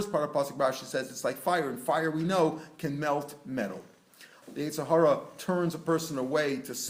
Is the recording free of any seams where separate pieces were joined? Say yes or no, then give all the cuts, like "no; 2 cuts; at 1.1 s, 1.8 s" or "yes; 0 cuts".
no; 1 cut; at 4.4 s